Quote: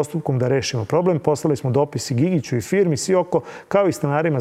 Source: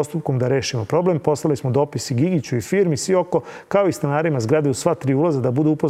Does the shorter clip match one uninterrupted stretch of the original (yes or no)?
yes